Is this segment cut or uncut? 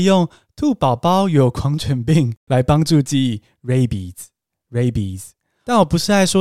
uncut